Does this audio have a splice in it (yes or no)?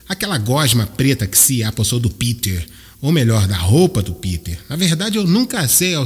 no